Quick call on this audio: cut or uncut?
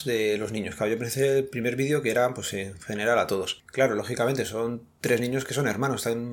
cut